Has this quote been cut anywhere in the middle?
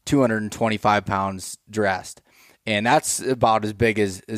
no; 0 cuts

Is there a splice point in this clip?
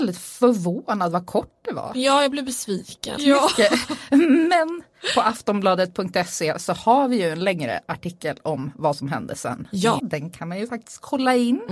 yes; 2 cuts; at 3.2 s, 10.0 s

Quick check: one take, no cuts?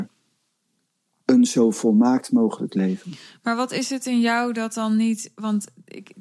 yes; 0 cuts

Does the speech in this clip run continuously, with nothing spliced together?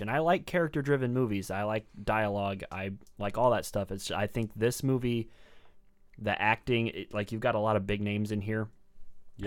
yes; 0 cuts

